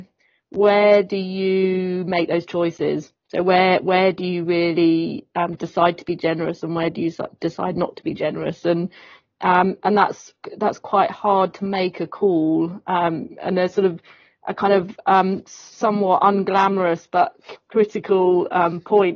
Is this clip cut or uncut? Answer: uncut